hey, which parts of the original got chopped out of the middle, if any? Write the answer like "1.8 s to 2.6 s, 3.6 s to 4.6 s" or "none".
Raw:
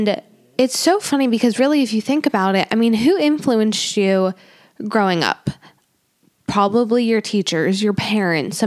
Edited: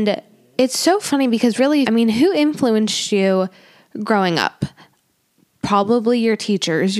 1.8 s to 2.7 s